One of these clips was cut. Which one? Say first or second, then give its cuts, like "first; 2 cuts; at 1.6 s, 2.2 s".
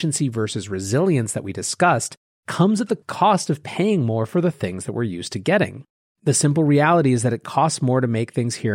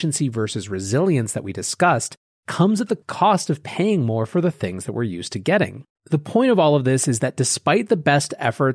second; 1 cut; at 5.9 s